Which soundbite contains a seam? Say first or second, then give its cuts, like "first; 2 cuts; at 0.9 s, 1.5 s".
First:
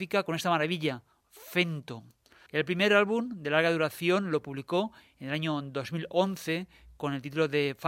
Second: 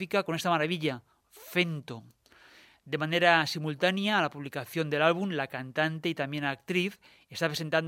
first; 1 cut; at 2.5 s